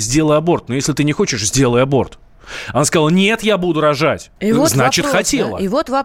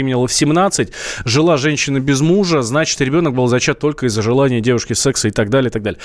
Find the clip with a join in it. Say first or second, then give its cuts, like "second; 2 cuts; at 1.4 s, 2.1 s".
first; 1 cut; at 4.4 s